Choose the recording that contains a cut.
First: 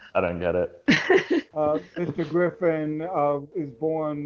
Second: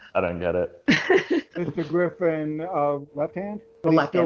second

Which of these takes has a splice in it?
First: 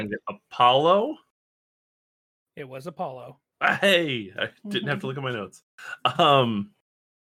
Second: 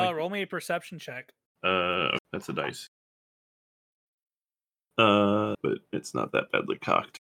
second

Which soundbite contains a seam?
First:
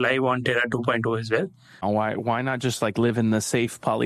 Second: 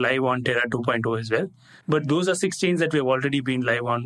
first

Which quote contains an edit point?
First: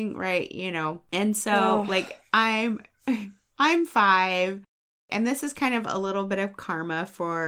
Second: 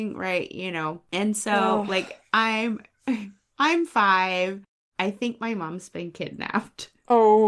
second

